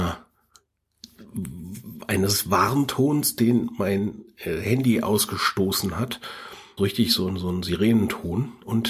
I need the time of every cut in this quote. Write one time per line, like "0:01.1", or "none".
0:06.8